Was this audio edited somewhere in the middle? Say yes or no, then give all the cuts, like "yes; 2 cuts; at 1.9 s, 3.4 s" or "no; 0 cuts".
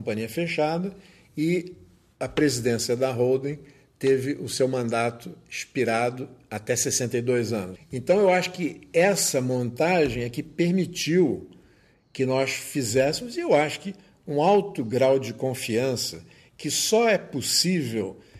yes; 1 cut; at 7.8 s